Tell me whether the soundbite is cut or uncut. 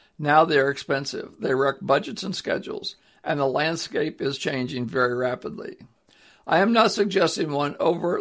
uncut